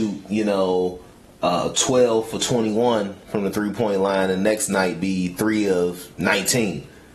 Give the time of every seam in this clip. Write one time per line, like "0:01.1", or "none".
0:06.1